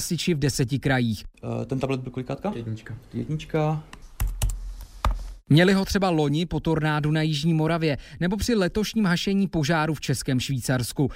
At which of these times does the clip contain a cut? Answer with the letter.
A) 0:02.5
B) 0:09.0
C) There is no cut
C